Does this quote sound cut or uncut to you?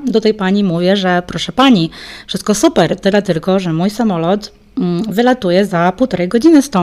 uncut